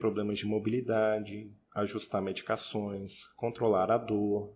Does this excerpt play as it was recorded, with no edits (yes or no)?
no